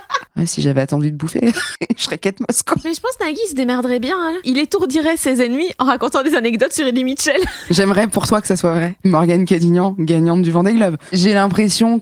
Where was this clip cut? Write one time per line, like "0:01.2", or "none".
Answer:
none